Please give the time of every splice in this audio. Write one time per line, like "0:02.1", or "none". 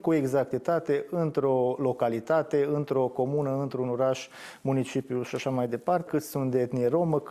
0:06.1